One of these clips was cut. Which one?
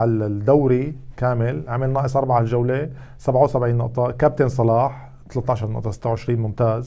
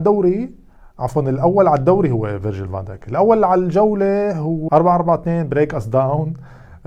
second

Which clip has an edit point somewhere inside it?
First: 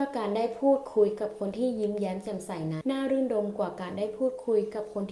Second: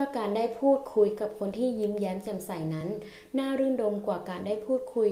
first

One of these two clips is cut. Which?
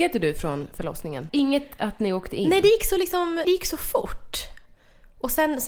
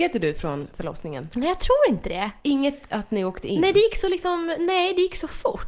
first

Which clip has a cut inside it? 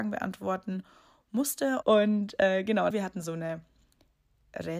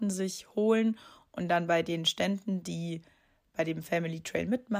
first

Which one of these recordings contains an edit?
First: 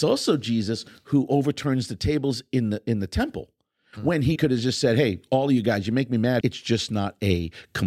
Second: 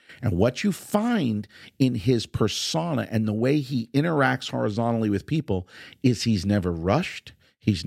first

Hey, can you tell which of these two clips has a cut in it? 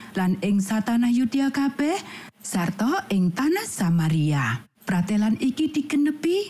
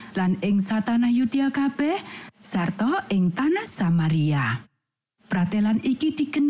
first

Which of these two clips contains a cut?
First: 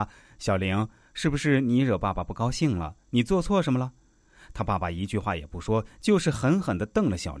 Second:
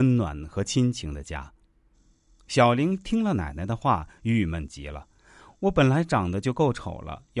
second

